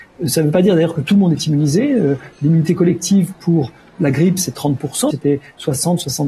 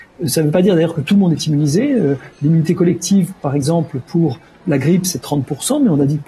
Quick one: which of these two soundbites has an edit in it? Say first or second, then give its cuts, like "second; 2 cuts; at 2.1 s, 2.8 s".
first; 2 cuts; at 3.3 s, 5.1 s